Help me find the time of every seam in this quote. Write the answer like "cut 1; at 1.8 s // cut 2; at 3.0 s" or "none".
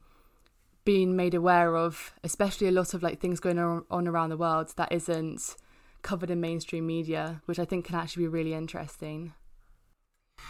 none